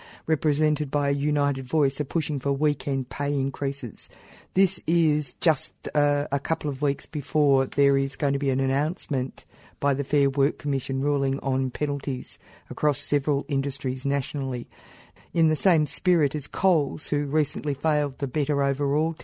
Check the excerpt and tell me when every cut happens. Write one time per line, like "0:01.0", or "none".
none